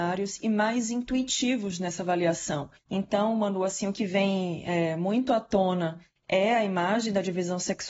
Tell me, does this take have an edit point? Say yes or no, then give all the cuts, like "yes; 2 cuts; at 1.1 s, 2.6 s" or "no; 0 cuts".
yes; 1 cut; at 2.8 s